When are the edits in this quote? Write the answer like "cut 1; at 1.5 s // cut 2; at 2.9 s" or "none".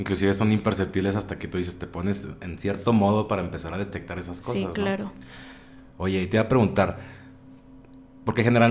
none